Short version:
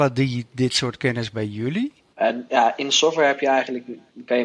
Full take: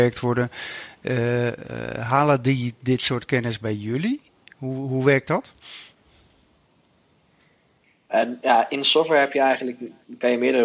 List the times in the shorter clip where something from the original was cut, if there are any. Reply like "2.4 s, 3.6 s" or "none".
2.1 s